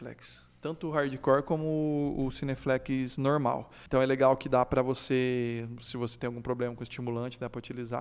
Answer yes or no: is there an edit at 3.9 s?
yes